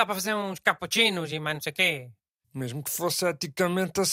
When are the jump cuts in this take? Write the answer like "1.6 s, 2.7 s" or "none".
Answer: 2.4 s

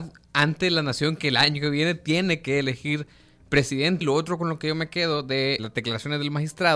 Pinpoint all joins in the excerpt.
4.0 s, 5.6 s

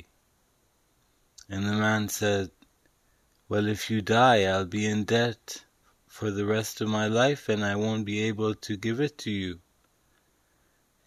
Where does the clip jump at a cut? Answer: none

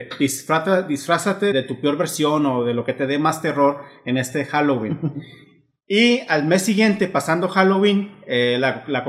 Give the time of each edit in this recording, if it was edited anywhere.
1.5 s

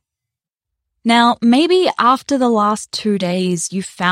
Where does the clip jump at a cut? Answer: none

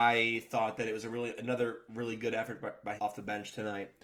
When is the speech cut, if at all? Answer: 3.0 s

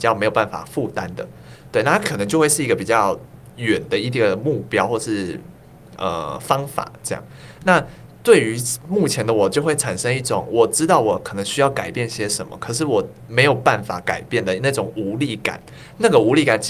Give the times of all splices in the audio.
none

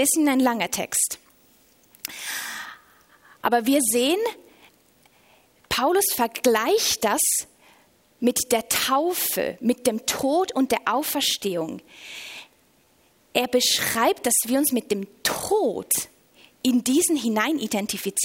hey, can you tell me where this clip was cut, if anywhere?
none

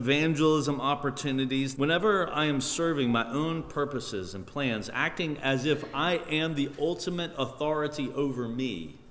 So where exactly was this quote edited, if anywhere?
1.7 s

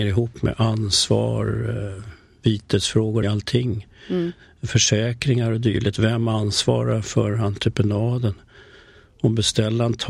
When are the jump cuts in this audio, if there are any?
3.2 s

